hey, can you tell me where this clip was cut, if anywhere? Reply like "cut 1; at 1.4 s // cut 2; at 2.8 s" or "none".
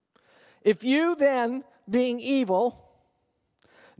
none

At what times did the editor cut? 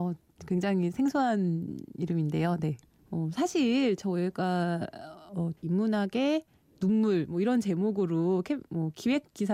cut 1; at 3.0 s // cut 2; at 5.6 s

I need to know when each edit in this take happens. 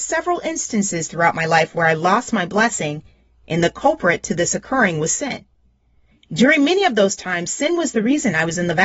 none

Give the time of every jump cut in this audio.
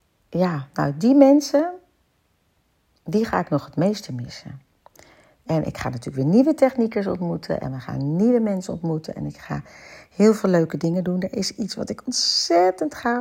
none

